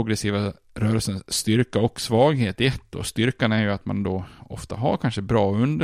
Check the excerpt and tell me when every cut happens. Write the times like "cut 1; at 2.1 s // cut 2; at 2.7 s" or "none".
none